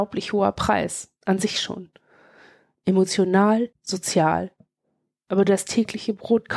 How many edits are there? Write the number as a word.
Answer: one